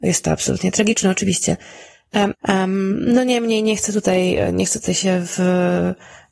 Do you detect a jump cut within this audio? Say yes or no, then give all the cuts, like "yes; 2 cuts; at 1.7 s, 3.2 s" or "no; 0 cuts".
yes; 1 cut; at 2.3 s